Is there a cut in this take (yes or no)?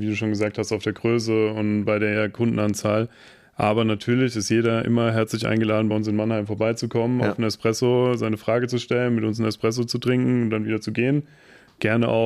no